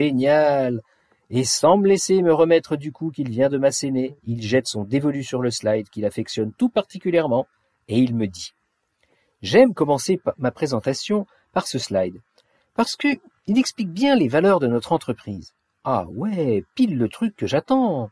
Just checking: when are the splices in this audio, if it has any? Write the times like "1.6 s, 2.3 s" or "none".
none